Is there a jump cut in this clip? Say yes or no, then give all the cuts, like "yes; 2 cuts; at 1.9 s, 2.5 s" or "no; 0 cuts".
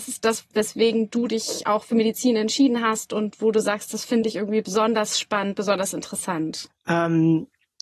yes; 1 cut; at 6.7 s